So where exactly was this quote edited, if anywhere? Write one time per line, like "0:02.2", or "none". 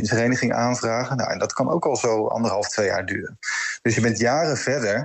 none